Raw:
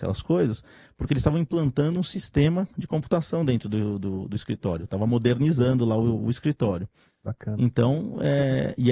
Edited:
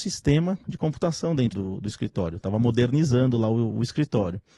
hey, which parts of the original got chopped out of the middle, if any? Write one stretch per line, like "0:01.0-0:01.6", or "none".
0:03.6-0:04.0